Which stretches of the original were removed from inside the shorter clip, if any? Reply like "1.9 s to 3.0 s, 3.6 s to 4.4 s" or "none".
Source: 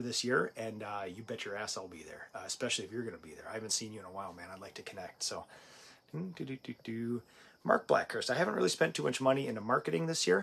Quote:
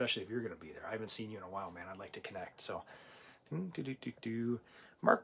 none